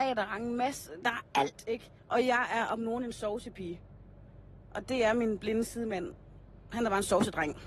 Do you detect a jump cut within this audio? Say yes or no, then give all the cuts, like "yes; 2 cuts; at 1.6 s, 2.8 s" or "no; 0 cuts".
yes; 1 cut; at 2.0 s